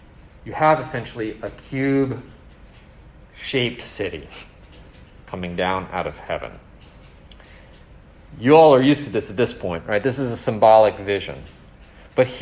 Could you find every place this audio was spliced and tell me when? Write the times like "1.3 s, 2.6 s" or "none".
none